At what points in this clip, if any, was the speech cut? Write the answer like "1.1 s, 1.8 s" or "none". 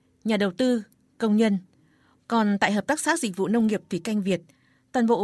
2.2 s

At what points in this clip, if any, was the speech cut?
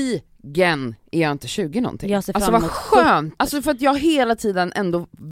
3.4 s

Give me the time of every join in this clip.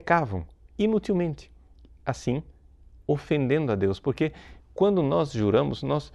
none

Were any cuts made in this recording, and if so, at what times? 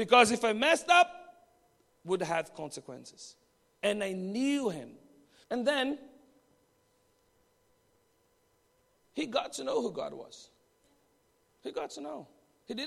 5.4 s

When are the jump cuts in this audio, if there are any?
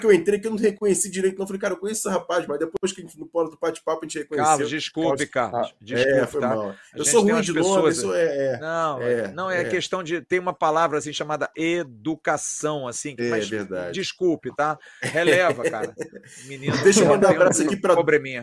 none

